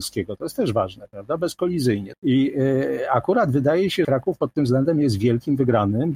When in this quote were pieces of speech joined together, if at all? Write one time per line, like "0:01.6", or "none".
0:02.1
0:04.0

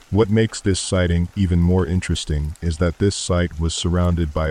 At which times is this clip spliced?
none

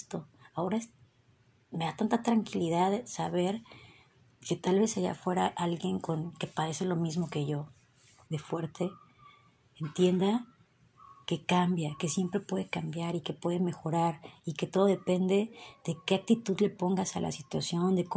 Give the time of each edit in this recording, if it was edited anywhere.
0:08.3

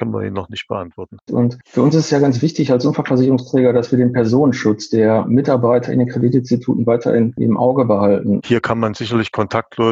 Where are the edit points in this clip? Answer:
0:01.3
0:08.4

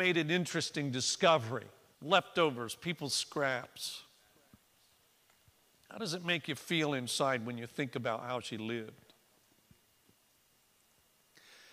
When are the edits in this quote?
0:01.9

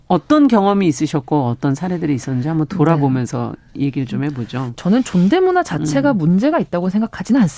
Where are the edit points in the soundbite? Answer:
none

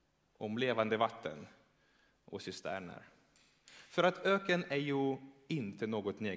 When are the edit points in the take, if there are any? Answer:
none

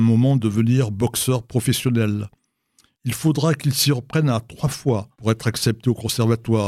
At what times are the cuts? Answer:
0:02.9
0:05.1

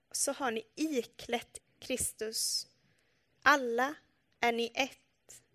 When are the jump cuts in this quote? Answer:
0:01.6

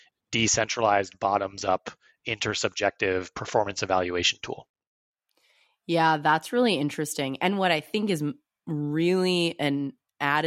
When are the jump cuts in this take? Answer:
none

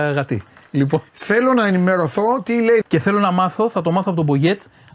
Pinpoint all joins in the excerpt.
0:01.1
0:02.8

